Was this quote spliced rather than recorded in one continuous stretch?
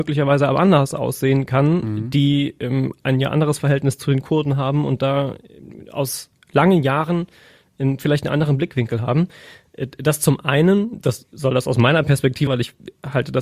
yes; 1 cut; at 12.5 s

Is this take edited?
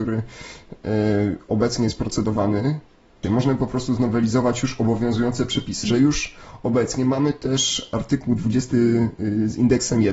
yes; 2 cuts; at 3.2 s, 5.8 s

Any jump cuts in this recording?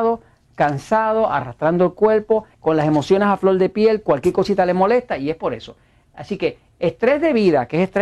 yes; 1 cut; at 2.5 s

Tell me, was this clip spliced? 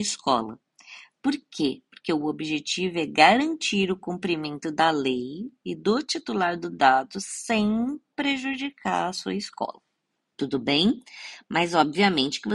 no; 0 cuts

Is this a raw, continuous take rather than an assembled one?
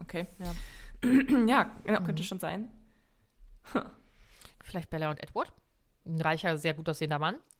no; 2 cuts; at 2.0 s, 4.5 s

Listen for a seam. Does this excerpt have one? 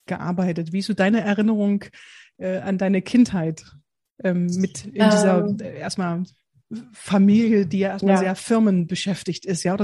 no; 0 cuts

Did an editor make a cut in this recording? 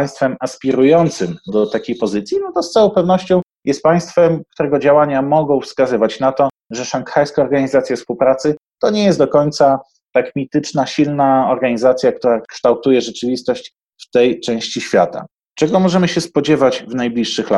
yes; 1 cut; at 1.5 s

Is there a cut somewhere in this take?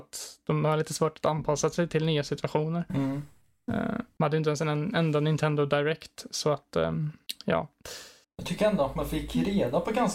yes; 2 cuts; at 4.2 s, 8.2 s

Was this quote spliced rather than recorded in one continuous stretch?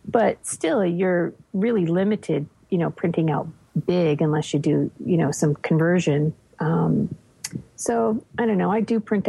no; 0 cuts

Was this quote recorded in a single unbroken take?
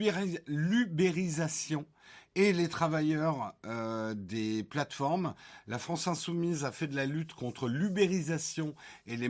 yes; 0 cuts

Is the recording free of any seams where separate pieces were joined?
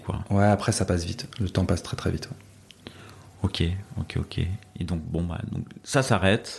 yes; 0 cuts

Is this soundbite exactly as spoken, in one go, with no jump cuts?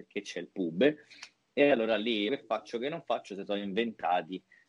no; 1 cut; at 2.3 s

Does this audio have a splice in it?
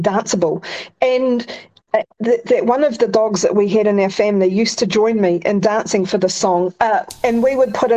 yes; 1 cut; at 2.2 s

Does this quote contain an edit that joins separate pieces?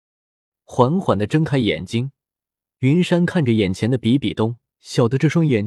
yes; 1 cut; at 4.8 s

